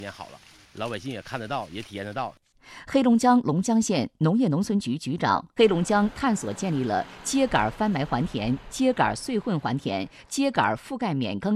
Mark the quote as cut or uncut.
cut